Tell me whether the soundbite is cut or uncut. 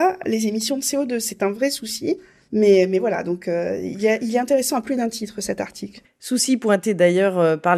uncut